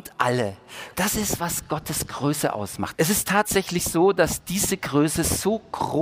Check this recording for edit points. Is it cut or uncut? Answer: cut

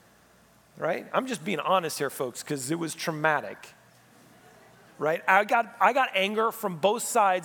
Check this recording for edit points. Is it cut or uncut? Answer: uncut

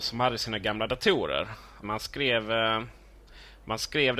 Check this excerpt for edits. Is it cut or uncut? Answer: cut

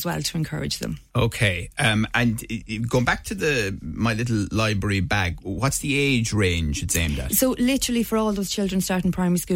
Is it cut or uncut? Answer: uncut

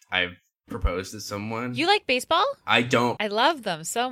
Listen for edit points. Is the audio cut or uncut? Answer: cut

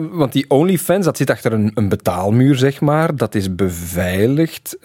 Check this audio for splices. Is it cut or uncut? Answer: uncut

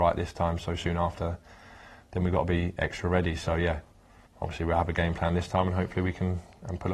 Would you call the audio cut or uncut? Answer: cut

